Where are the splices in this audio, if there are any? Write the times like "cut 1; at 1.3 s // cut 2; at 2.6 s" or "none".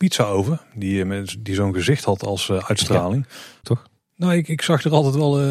cut 1; at 3.6 s